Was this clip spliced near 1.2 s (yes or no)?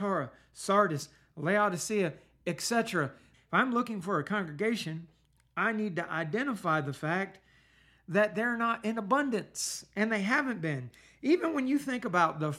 no